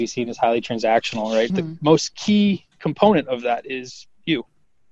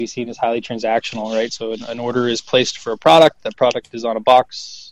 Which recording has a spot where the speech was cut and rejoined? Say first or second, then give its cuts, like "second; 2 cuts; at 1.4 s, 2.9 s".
first; 1 cut; at 1.5 s